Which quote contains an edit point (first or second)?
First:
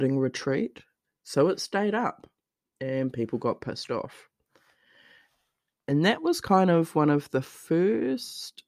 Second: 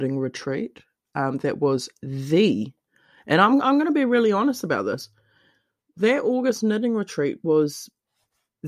first